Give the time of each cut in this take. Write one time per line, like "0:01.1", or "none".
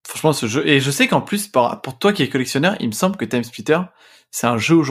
none